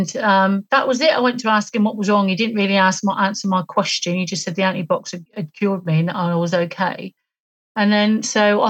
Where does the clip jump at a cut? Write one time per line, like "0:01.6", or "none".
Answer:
0:05.3